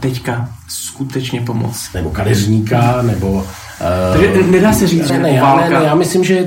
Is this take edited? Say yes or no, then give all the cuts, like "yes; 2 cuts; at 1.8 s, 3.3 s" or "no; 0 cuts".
yes; 2 cuts; at 1.9 s, 5.1 s